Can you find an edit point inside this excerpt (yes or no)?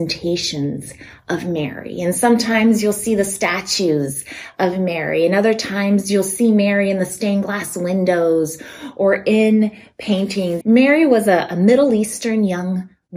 yes